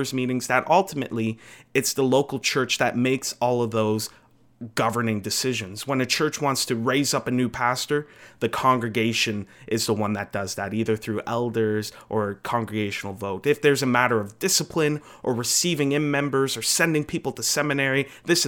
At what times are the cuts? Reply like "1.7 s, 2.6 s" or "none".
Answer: none